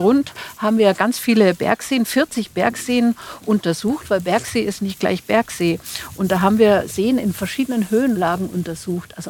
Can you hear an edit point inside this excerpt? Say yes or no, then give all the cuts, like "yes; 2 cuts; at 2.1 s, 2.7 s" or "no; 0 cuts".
no; 0 cuts